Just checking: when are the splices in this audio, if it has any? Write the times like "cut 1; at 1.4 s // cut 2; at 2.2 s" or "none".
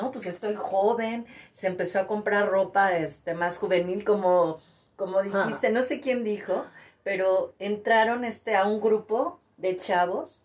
none